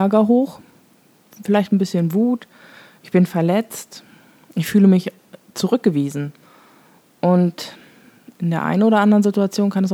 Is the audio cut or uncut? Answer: uncut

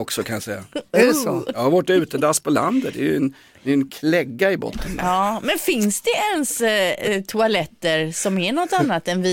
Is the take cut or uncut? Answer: uncut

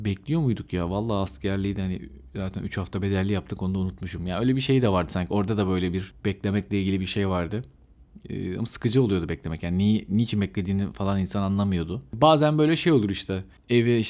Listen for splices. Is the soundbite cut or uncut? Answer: uncut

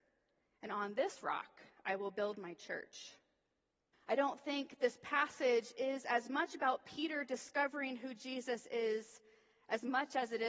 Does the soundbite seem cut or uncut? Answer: cut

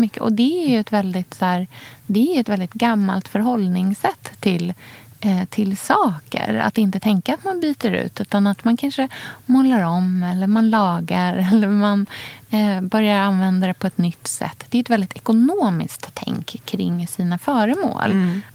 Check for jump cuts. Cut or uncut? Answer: uncut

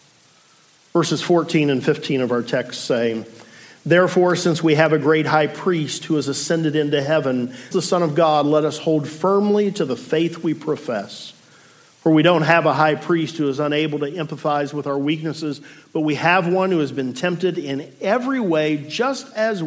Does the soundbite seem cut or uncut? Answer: cut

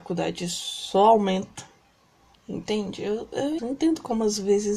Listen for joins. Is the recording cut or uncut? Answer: cut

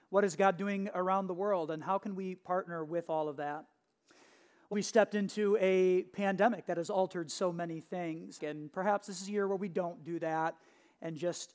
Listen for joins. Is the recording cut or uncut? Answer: cut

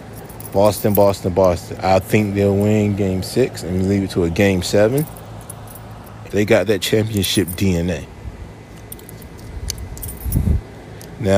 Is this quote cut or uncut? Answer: cut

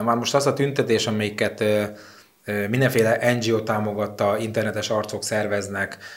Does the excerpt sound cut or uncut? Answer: uncut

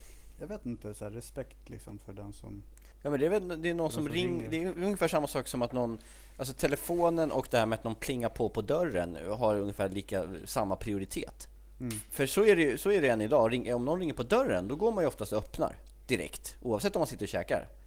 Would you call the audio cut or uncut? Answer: uncut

